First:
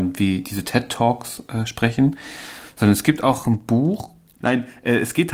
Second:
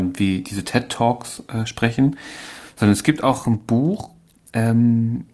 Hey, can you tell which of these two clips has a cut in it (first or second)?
first